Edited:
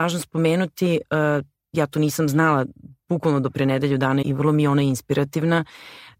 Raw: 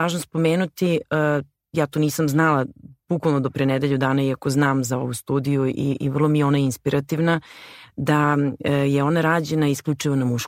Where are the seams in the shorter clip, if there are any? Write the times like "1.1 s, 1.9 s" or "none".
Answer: 4.2 s